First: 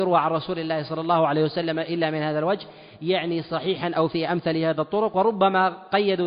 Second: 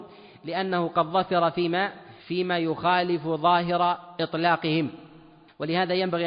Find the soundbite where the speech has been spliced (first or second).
second